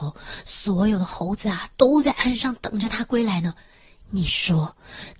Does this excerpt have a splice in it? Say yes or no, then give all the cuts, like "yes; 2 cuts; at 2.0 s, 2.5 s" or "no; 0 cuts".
yes; 1 cut; at 4.0 s